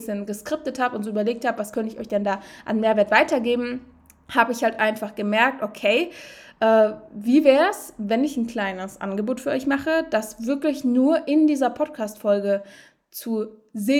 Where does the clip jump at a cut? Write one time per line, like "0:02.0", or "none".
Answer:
none